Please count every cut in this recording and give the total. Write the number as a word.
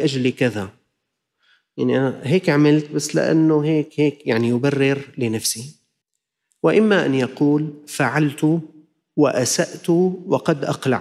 zero